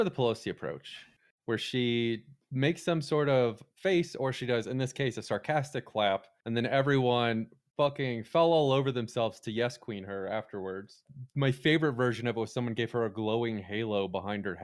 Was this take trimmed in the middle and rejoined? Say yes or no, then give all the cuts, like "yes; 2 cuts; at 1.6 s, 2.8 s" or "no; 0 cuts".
no; 0 cuts